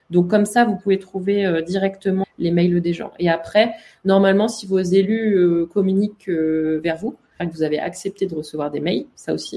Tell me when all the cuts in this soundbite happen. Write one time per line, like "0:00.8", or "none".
0:02.2
0:07.4